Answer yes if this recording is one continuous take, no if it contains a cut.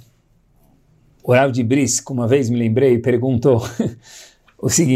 no